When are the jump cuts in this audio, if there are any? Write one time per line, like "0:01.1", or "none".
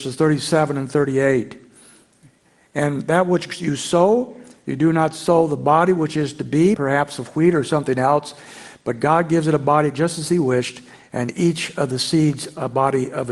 0:06.7

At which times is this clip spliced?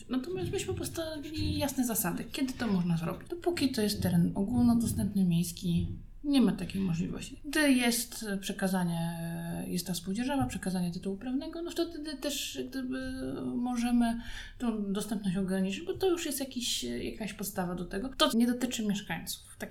0:18.3

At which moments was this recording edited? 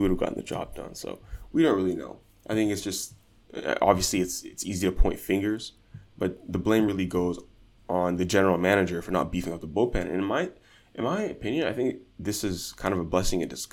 none

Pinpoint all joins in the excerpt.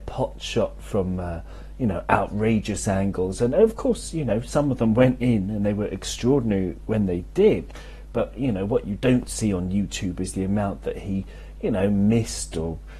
none

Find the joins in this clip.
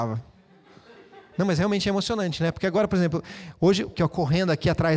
0:03.9

